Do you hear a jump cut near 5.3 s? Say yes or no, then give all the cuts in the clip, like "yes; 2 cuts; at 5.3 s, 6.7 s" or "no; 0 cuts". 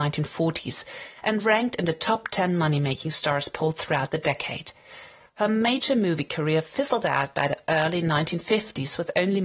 no; 0 cuts